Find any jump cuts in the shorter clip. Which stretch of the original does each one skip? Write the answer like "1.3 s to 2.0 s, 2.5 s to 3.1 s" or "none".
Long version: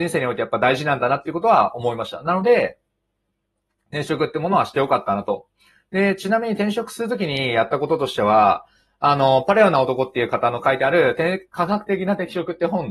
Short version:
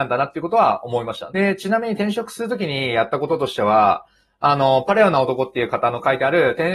2.2 s to 5.9 s